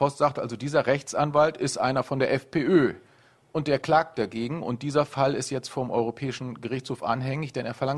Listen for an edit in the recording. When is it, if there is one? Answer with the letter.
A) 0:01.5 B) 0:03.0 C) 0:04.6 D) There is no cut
D